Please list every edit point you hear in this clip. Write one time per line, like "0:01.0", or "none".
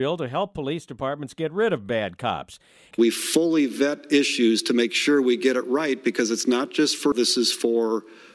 0:02.9
0:07.1